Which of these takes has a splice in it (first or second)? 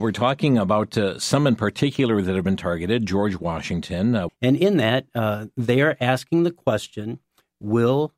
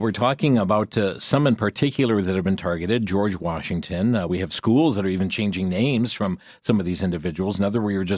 first